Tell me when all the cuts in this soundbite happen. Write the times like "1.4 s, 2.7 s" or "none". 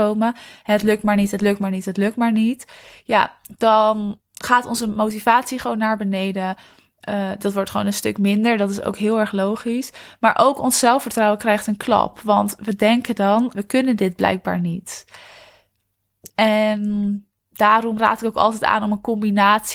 13.5 s, 16.3 s